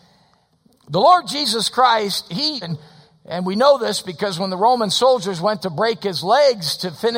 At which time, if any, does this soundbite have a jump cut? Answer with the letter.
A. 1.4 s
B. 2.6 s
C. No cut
B